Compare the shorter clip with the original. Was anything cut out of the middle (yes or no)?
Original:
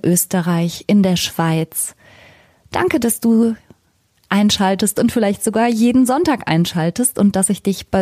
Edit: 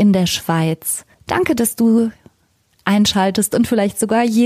yes